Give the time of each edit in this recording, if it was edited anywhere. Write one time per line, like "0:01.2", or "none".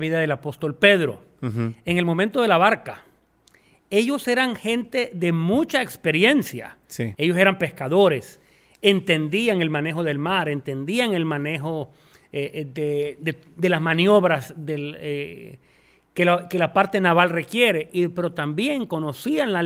0:07.1